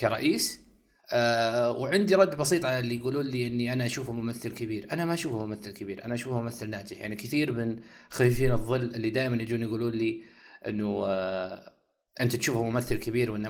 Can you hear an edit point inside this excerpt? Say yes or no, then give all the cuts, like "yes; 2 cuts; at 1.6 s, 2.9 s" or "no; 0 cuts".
yes; 1 cut; at 1.0 s